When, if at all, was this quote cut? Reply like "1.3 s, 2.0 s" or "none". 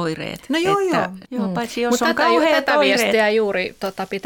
1.2 s